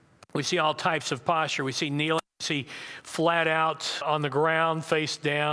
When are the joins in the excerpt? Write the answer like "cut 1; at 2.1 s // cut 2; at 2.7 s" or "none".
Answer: cut 1; at 4.0 s